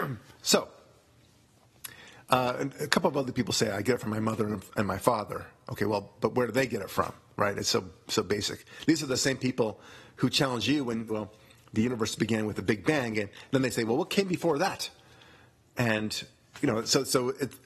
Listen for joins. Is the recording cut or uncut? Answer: cut